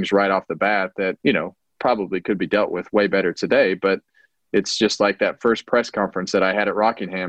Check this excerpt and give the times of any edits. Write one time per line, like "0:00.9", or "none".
0:01.2